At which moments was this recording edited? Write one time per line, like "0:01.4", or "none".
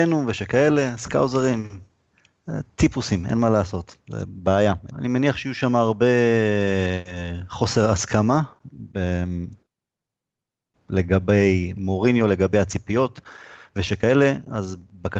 0:04.9